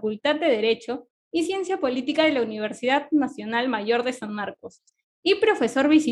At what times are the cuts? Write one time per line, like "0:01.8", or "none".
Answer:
none